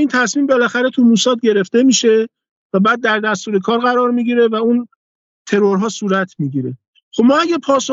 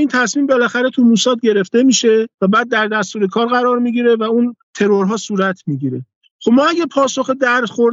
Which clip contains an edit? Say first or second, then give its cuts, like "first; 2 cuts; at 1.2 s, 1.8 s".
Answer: second; 2 cuts; at 2.3 s, 4.6 s